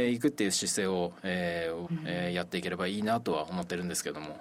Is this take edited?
yes; 1 cut; at 1.9 s

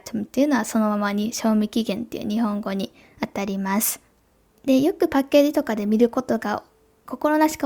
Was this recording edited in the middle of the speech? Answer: no; 0 cuts

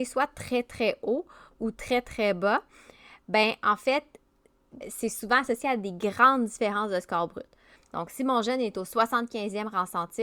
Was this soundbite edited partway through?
yes; 2 cuts; at 4.8 s, 7.8 s

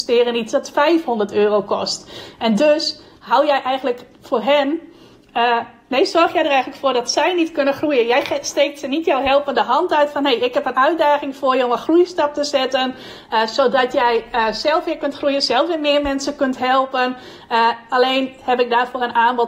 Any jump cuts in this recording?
no; 0 cuts

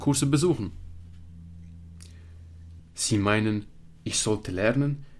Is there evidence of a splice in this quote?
yes; 1 cut; at 2.8 s

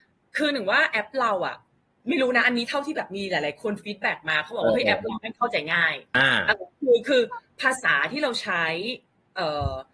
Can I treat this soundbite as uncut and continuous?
no; 1 cut; at 6.1 s

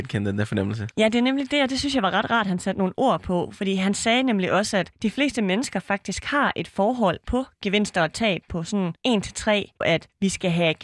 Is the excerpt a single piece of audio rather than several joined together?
no; 1 cut; at 9.8 s

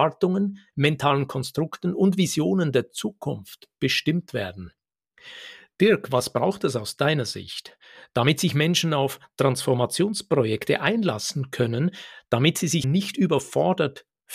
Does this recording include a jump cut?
yes; 1 cut; at 12.8 s

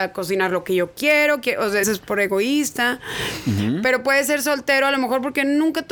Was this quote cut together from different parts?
yes; 1 cut; at 1.8 s

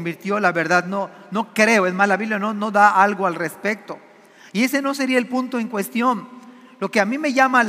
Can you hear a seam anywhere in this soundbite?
no; 0 cuts

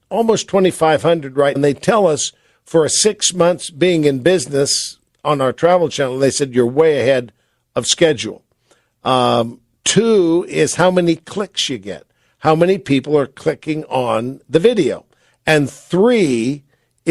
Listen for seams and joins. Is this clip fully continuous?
no; 1 cut; at 1.6 s

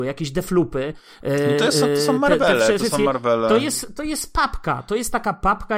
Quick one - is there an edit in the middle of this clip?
no; 0 cuts

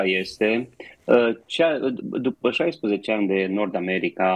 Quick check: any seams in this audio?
no; 0 cuts

